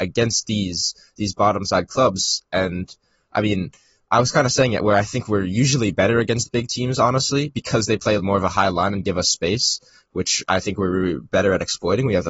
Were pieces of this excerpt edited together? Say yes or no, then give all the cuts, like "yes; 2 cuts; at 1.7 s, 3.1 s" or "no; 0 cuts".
yes; 1 cut; at 8.2 s